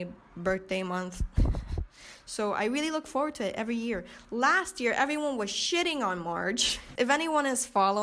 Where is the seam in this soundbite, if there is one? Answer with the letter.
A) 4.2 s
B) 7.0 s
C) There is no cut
B